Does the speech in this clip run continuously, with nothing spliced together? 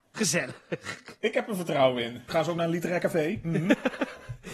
no; 1 cut; at 2.3 s

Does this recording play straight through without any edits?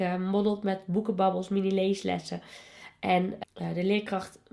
no; 1 cut; at 3.4 s

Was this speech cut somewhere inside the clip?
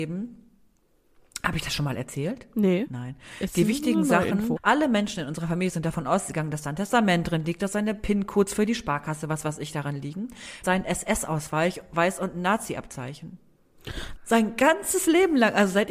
yes; 3 cuts; at 4.6 s, 10.6 s, 14.2 s

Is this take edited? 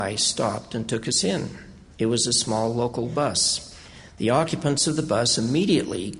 no; 0 cuts

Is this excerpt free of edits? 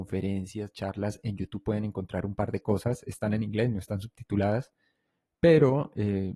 yes; 0 cuts

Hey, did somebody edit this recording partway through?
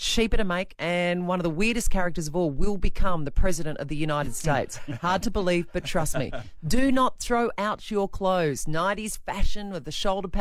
no; 0 cuts

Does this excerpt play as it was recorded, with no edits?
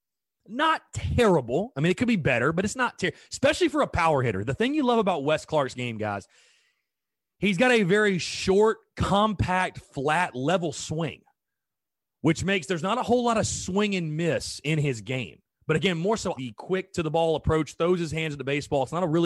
no; 1 cut; at 16.4 s

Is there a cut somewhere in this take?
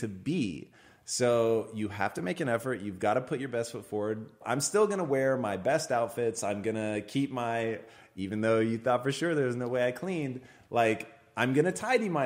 yes; 1 cut; at 4.4 s

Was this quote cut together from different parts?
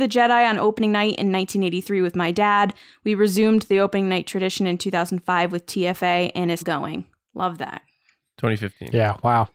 yes; 1 cut; at 6.6 s

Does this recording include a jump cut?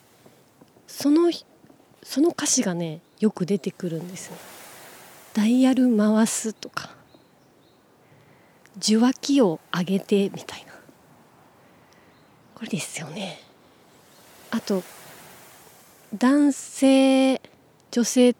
yes; 1 cut; at 12.7 s

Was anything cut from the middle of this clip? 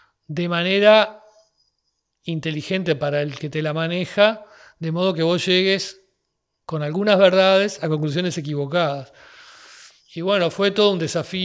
no; 0 cuts

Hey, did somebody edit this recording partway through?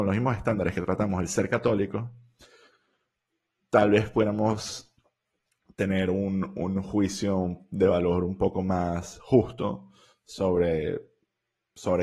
no; 0 cuts

